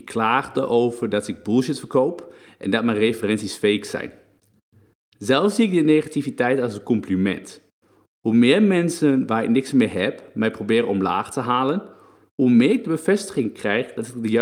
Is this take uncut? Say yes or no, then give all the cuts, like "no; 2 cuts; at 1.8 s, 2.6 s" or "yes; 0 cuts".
yes; 0 cuts